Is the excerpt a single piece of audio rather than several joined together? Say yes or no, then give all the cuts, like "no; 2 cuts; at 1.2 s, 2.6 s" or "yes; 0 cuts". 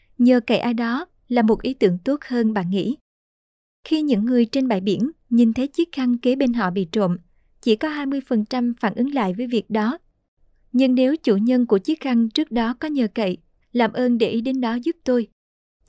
yes; 0 cuts